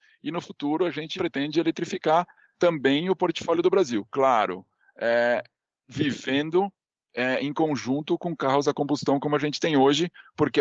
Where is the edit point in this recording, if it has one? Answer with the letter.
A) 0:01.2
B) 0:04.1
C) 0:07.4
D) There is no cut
A